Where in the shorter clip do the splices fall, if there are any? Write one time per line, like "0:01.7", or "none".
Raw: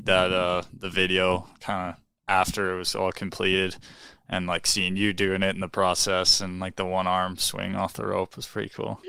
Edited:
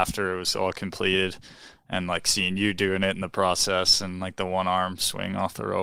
none